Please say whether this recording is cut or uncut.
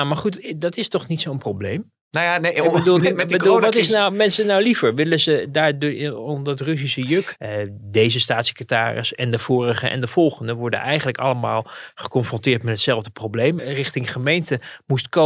cut